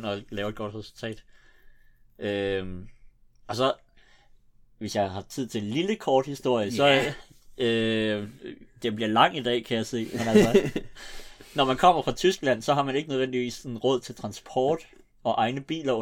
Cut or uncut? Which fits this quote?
uncut